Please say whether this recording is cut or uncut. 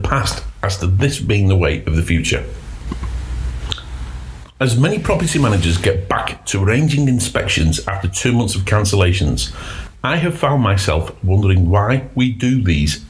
uncut